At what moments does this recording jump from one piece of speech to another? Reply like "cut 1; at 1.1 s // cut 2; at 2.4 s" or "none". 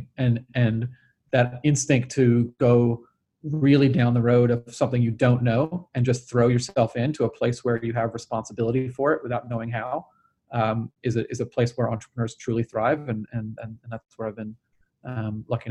none